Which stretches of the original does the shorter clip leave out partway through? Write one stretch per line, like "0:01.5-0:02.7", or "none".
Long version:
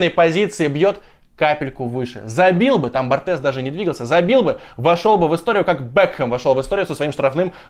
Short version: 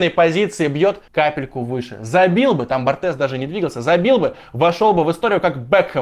0:01.1-0:01.3